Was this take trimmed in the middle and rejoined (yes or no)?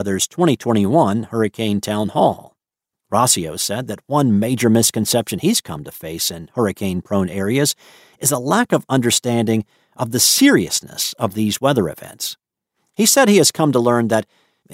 yes